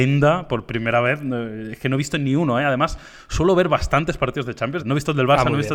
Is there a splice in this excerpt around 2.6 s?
no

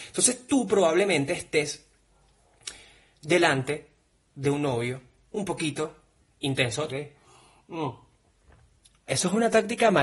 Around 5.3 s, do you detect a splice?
no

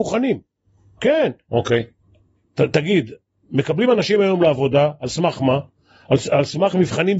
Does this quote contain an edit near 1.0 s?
yes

